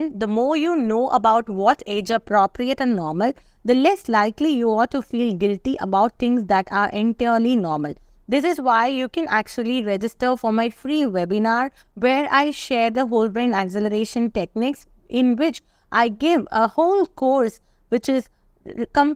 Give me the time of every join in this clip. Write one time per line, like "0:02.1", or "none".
none